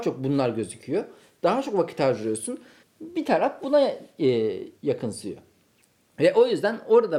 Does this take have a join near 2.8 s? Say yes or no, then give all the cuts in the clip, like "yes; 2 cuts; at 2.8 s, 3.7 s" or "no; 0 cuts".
yes; 2 cuts; at 2.8 s, 4.7 s